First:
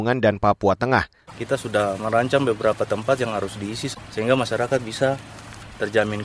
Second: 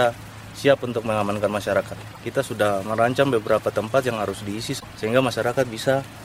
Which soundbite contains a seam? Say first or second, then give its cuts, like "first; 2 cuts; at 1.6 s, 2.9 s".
first; 1 cut; at 1.3 s